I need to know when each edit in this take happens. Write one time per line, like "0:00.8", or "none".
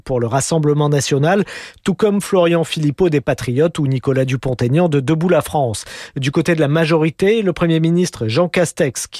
none